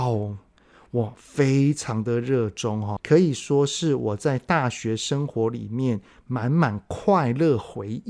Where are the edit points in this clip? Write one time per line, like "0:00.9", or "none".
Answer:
0:03.0